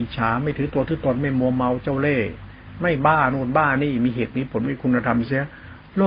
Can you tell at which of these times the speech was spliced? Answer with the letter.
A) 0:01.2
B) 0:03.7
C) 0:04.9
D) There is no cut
D